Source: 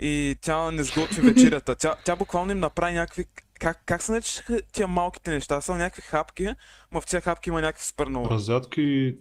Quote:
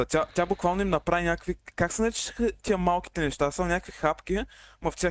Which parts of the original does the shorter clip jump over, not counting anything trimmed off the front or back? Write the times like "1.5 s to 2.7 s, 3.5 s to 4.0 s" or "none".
3.4 s to 3.8 s